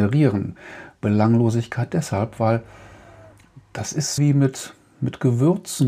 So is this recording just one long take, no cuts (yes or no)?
no